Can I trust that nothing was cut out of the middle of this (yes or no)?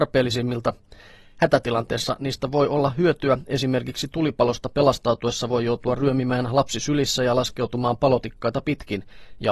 yes